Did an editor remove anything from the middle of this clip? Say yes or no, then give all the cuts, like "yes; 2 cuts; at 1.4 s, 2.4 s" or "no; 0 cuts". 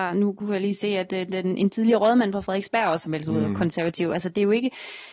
no; 0 cuts